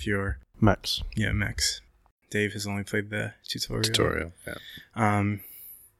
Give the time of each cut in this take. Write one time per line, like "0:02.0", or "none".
0:02.2